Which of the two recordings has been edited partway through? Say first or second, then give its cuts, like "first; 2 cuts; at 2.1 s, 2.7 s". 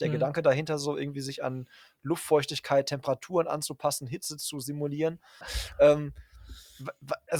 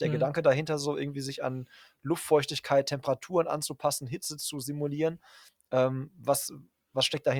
first; 1 cut; at 5.4 s